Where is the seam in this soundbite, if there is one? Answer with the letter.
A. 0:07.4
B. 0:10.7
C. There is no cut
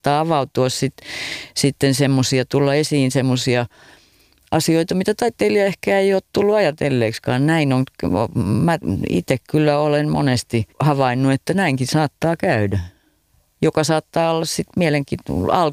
B